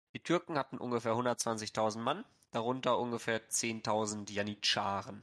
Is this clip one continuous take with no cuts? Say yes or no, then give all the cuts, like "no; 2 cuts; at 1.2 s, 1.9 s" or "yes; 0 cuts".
yes; 0 cuts